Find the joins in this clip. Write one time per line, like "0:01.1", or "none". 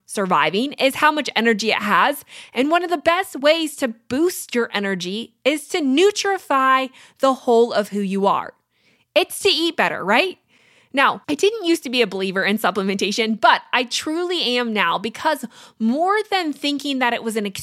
none